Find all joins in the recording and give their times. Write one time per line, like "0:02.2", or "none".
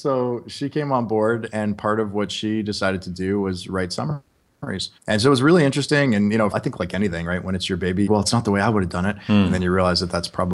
0:05.0
0:06.5
0:08.1